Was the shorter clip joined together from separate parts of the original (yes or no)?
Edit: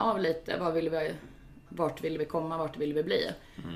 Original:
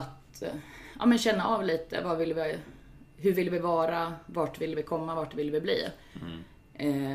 yes